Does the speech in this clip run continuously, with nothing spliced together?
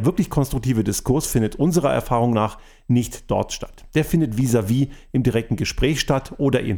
yes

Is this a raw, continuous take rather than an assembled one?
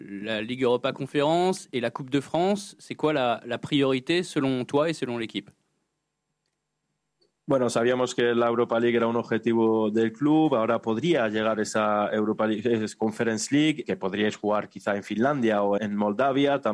no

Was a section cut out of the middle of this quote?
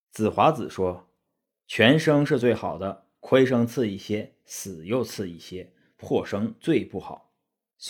no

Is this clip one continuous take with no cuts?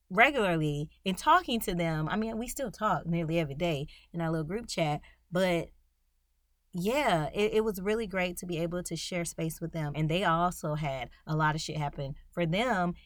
no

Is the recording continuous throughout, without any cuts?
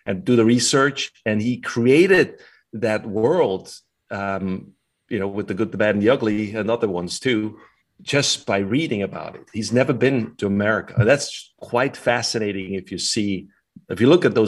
yes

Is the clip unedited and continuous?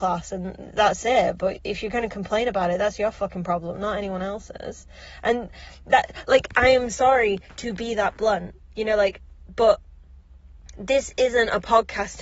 yes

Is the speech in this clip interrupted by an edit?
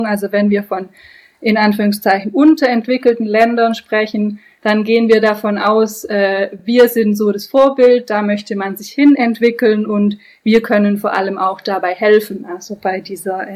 no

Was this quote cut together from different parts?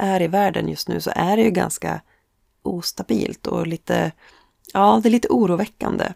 no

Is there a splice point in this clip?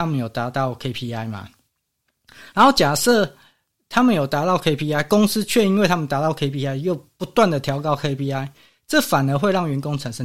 no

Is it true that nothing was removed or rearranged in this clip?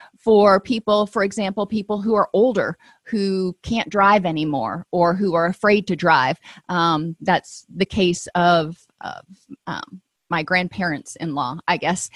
yes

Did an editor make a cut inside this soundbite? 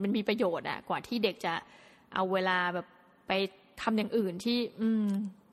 no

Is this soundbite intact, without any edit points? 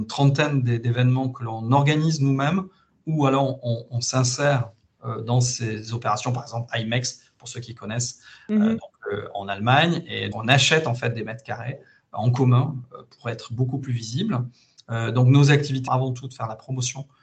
no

